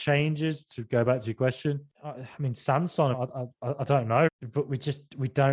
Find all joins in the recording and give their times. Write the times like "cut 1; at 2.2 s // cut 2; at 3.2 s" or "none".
cut 1; at 3.1 s // cut 2; at 4.3 s